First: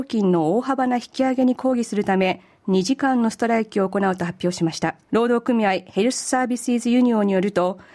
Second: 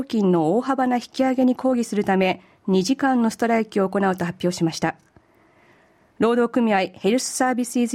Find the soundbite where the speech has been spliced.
first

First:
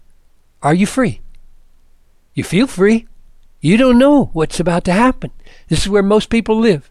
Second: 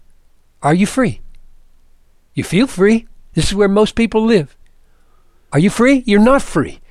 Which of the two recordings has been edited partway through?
second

